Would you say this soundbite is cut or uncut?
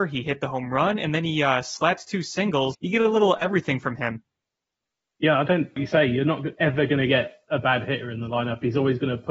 cut